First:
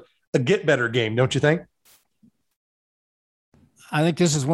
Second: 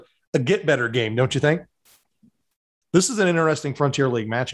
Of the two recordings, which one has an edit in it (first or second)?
second